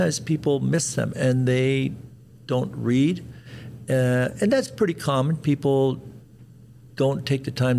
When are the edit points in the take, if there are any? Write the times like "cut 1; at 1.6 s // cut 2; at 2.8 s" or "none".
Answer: none